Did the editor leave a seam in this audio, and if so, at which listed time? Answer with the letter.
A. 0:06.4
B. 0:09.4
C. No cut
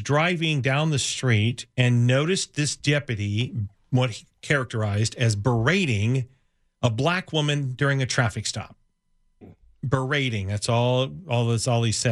B